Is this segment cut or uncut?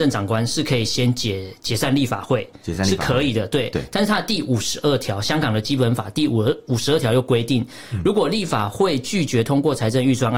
uncut